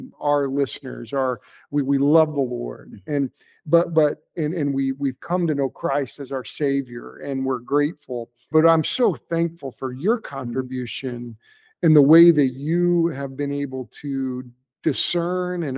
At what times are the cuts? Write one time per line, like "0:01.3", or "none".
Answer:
0:08.5